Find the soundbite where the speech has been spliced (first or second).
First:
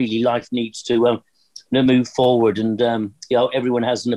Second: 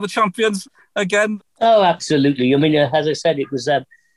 second